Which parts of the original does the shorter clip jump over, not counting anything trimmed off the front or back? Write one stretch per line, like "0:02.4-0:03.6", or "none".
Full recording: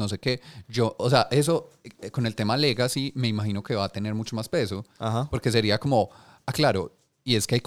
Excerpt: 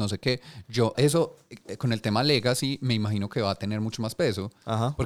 0:00.9-0:01.3